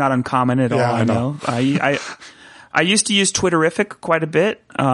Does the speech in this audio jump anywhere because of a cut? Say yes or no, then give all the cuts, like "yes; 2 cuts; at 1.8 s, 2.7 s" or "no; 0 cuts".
no; 0 cuts